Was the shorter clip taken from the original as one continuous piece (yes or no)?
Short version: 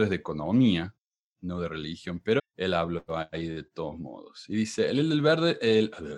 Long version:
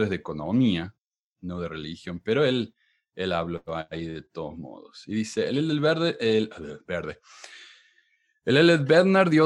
no